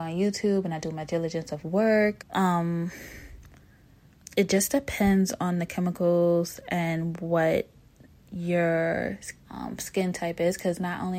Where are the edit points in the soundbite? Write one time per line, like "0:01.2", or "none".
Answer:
0:02.2
0:09.4